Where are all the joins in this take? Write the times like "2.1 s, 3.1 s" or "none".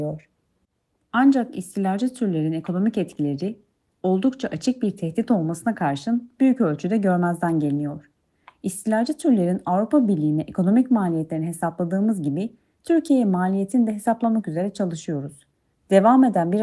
none